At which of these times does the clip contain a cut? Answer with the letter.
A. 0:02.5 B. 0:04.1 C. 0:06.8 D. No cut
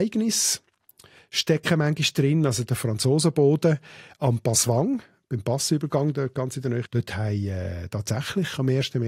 C